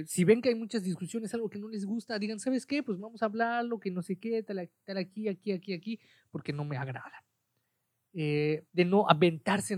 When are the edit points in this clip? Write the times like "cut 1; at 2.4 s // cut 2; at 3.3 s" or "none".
cut 1; at 8.7 s